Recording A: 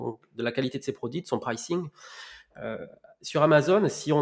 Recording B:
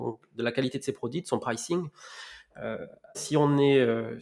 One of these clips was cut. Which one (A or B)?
B